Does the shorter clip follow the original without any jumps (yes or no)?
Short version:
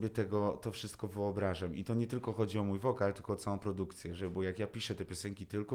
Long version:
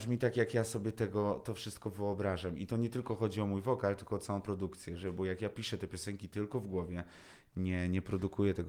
yes